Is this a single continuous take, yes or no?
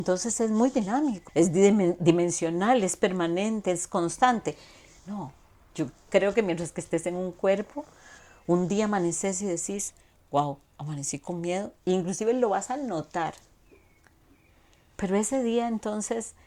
no